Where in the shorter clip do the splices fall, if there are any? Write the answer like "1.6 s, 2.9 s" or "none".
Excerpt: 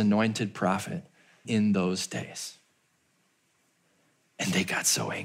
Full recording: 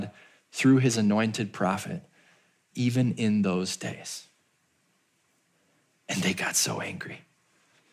1.4 s